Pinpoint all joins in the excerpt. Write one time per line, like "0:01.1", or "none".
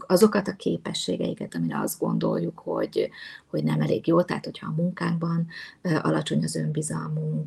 0:01.5